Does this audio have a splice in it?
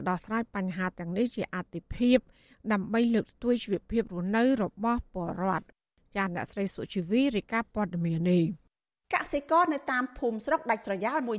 yes; 1 cut; at 8.2 s

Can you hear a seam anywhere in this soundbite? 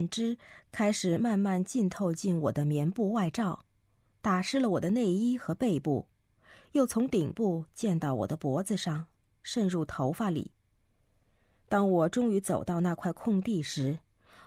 no; 0 cuts

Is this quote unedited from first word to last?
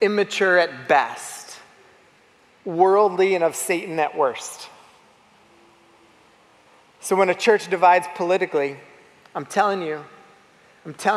yes; 0 cuts

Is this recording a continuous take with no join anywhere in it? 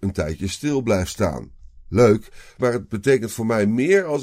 yes; 0 cuts

